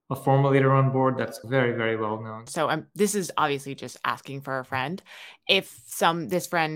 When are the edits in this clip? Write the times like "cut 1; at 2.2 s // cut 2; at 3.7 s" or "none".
cut 1; at 1.4 s // cut 2; at 2.5 s